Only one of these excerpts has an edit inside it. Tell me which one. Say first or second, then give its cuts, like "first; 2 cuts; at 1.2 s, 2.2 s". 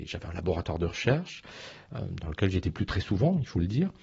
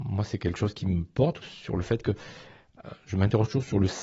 second; 1 cut; at 1.4 s